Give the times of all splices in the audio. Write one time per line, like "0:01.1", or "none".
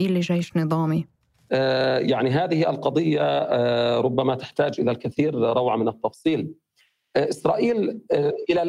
none